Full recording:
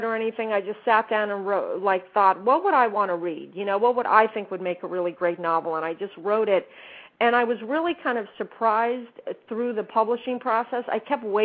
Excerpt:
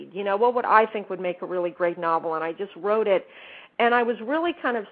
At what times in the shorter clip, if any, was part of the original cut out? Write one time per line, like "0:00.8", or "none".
none